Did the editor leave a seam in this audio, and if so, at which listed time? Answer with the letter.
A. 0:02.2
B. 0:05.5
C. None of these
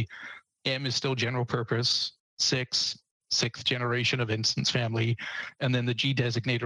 C